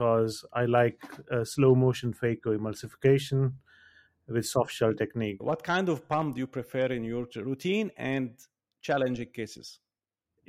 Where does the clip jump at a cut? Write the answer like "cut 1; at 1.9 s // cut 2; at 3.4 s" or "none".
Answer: cut 1; at 5.4 s